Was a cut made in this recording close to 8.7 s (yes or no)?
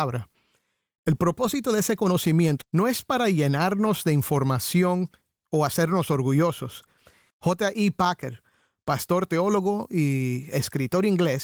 no